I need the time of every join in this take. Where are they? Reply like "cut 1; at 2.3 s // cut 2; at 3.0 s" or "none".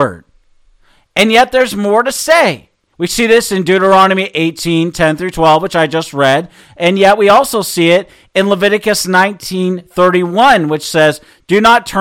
cut 1; at 2.9 s